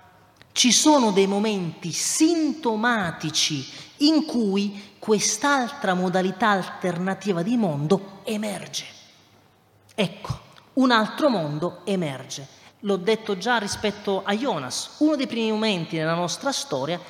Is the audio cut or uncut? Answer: cut